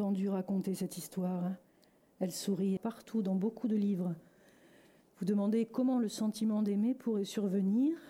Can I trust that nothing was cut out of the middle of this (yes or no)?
no